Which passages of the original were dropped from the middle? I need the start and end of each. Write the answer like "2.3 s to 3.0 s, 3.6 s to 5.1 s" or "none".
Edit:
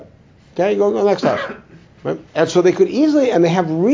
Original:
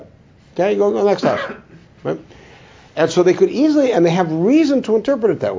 2.3 s to 2.9 s